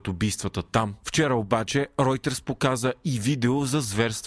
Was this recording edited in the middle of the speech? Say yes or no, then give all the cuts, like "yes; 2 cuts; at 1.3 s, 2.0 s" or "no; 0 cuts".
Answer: no; 0 cuts